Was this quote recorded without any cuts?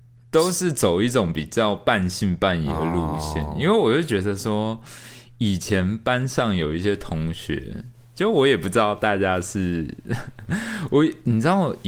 yes; 0 cuts

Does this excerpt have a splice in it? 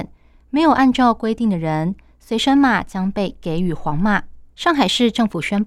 yes; 1 cut; at 4.5 s

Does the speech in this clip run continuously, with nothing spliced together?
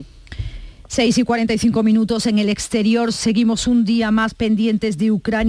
yes; 0 cuts

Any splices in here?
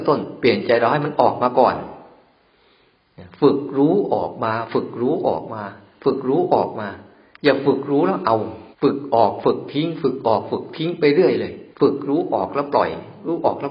yes; 2 cuts; at 8.7 s, 11.7 s

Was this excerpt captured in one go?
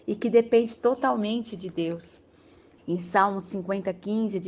no; 1 cut; at 2.8 s

